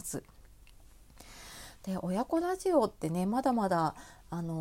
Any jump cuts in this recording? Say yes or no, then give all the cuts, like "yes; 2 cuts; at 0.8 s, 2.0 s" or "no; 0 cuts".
no; 0 cuts